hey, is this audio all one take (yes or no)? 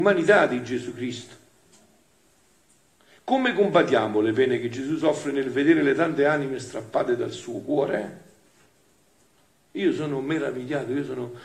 yes